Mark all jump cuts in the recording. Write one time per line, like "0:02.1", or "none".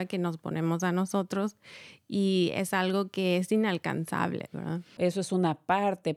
0:05.0